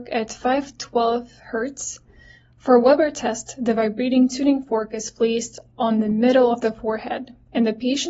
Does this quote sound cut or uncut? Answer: uncut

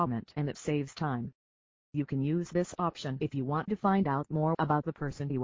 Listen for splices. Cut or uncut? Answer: uncut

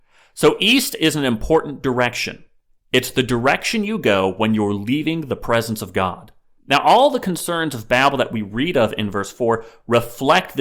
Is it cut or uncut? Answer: cut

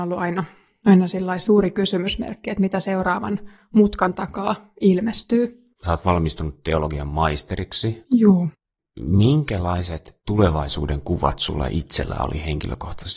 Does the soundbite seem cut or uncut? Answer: cut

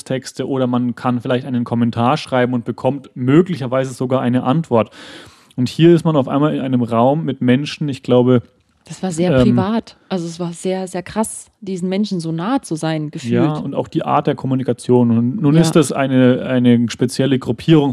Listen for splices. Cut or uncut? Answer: uncut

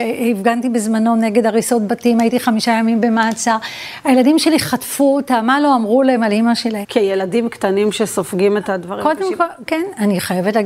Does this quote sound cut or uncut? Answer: cut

